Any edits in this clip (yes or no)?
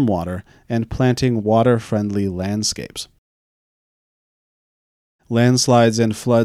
no